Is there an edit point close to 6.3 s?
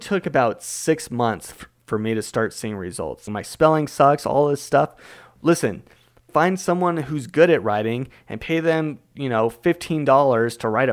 yes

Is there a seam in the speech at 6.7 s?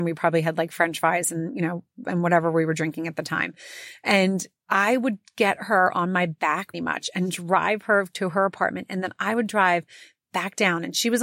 yes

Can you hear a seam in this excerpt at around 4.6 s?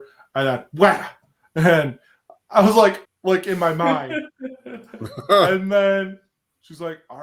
no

